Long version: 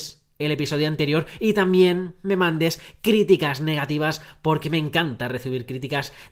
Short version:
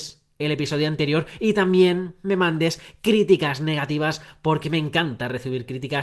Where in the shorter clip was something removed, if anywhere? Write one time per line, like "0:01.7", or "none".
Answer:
none